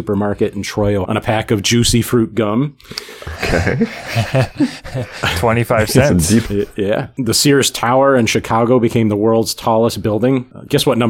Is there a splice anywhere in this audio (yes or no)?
yes